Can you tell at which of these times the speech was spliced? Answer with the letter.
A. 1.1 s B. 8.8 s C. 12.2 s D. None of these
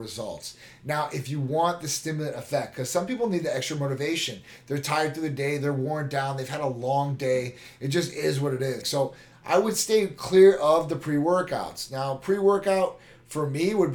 B